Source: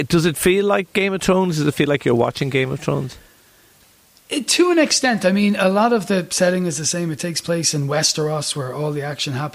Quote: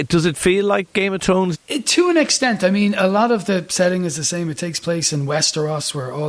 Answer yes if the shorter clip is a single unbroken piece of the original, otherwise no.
no